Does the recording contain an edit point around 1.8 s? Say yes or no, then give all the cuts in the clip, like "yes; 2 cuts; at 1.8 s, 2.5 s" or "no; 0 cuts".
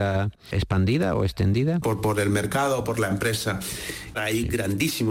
yes; 2 cuts; at 1.8 s, 4.1 s